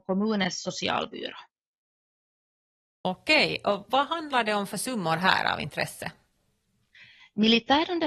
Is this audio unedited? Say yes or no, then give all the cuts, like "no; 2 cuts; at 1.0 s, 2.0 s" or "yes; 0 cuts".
yes; 0 cuts